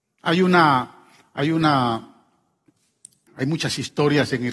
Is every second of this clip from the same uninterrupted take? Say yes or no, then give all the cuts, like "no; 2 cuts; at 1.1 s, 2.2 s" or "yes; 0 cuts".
no; 1 cut; at 3.3 s